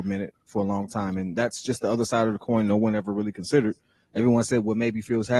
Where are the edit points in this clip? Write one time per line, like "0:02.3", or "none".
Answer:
none

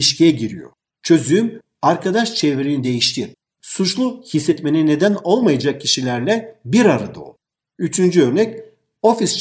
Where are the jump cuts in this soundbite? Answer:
none

